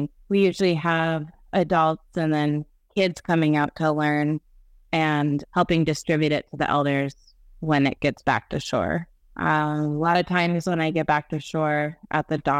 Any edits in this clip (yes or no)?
no